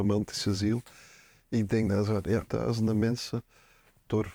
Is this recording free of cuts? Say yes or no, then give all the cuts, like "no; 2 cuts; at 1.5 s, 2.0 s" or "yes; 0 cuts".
no; 1 cut; at 2.5 s